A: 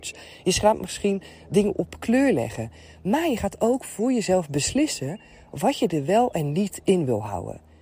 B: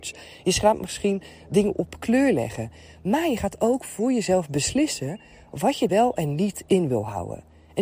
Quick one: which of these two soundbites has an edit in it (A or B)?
B